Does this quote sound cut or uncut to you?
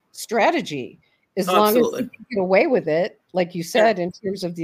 uncut